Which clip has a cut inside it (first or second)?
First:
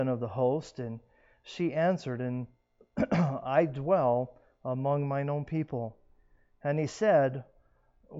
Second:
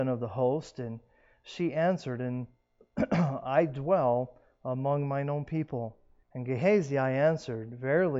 second